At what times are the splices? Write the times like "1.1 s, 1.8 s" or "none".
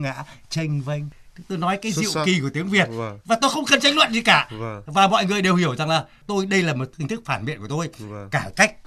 none